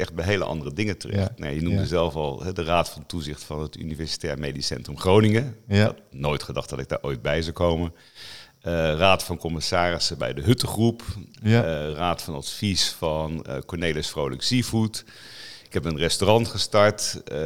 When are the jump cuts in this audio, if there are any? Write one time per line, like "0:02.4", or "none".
none